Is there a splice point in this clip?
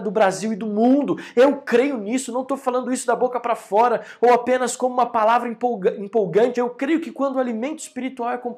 yes; 1 cut; at 6.5 s

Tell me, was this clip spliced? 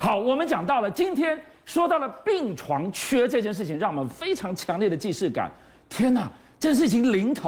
no; 0 cuts

